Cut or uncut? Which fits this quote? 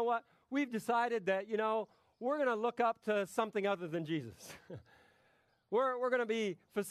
uncut